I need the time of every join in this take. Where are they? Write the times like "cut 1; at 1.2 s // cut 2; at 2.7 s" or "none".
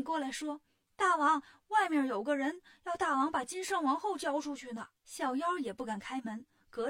cut 1; at 5.0 s